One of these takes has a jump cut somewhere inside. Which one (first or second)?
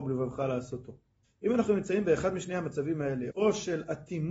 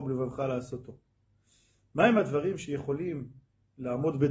first